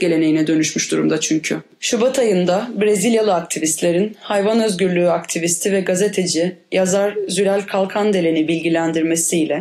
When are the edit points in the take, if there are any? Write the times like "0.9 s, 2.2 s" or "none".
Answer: none